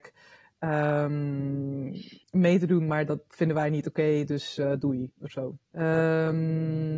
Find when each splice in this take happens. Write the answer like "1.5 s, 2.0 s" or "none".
2.2 s, 5.7 s

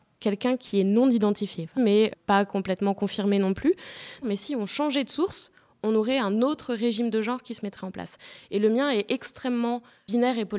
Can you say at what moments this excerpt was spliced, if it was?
1.8 s, 4.2 s

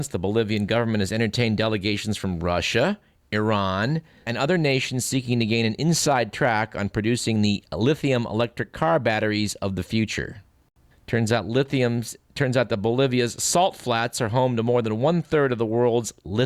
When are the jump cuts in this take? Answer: 4.3 s, 10.9 s

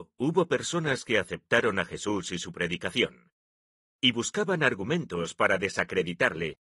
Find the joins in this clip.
3.8 s

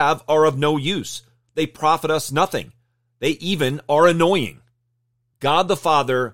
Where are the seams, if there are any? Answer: 5.3 s

